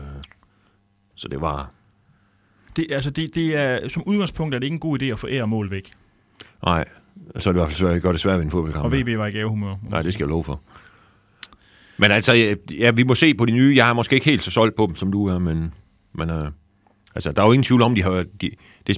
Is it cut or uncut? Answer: uncut